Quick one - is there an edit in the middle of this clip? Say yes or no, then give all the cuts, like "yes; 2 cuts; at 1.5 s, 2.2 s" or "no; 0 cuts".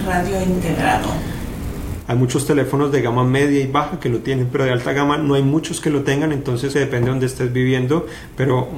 yes; 2 cuts; at 2.0 s, 6.7 s